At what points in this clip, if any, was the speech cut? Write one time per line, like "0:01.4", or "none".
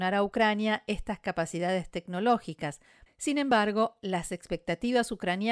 0:03.1